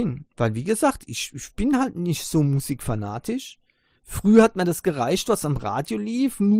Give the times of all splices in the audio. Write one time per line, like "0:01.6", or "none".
none